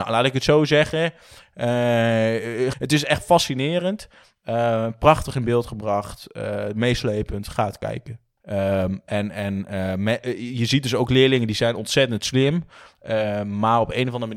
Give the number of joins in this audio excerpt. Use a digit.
2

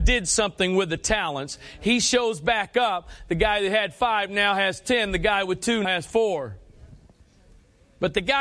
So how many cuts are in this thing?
1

